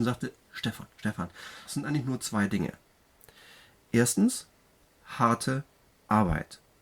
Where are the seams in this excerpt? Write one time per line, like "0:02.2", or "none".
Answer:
0:01.7